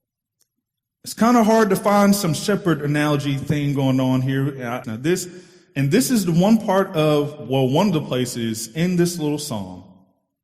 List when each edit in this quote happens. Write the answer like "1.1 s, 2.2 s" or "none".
4.8 s